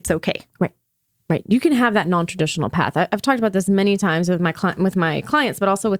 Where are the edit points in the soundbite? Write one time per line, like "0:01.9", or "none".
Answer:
none

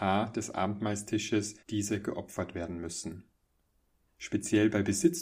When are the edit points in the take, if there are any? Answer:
0:01.6
0:04.1

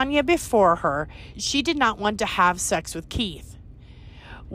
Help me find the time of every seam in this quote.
0:01.3

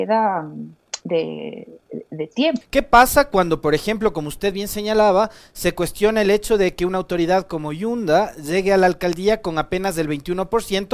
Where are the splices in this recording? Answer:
0:02.6

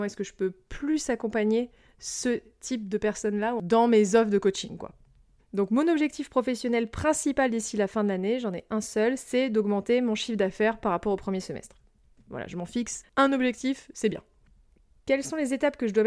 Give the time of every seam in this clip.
0:05.4
0:13.0

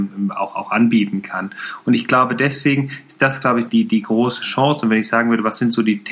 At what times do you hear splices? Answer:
0:03.7

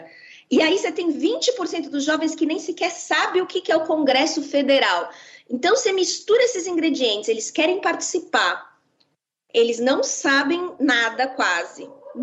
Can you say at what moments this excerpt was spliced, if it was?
none

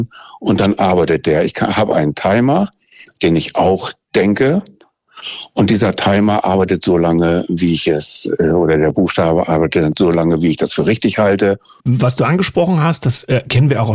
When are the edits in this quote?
0:11.8

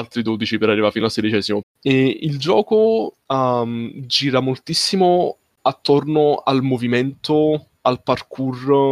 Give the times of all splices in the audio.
0:01.6
0:03.2

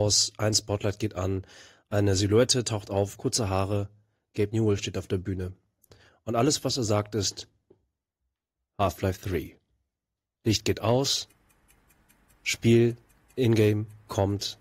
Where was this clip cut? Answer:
0:03.2

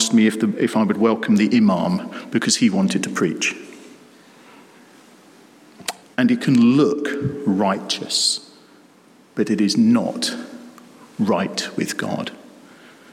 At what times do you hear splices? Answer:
0:06.0

